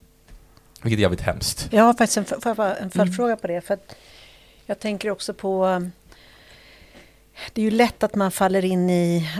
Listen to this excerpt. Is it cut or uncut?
cut